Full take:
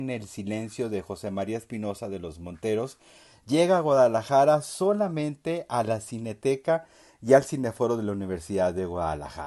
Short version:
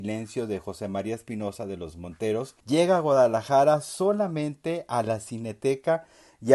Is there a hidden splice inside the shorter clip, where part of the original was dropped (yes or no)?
yes